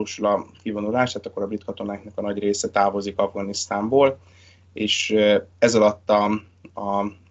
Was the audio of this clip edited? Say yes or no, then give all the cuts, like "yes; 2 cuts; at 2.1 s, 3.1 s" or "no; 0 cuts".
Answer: no; 0 cuts